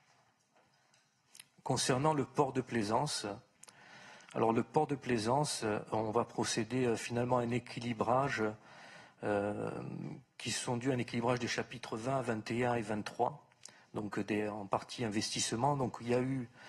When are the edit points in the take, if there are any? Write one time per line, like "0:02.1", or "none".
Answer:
0:04.2